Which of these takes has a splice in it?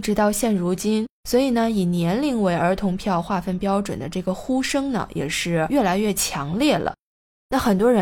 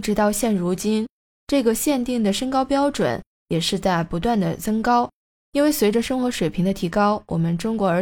first; 1 cut; at 1.2 s

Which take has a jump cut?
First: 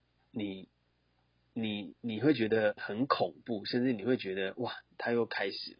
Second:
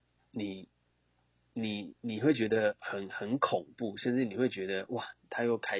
first; 1 cut; at 2.8 s

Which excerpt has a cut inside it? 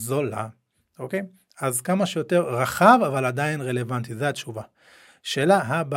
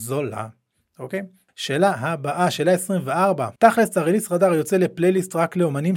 second; 2 cuts; at 1.5 s, 3.6 s

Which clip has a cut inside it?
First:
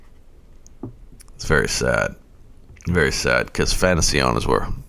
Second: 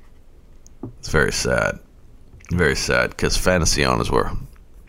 second; 1 cut; at 1.0 s

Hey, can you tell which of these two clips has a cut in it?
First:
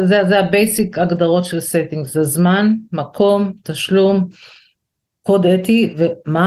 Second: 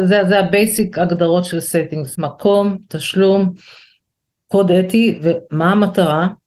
second; 1 cut; at 2.1 s

